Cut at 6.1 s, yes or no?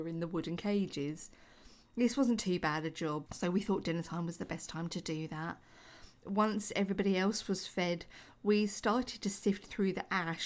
no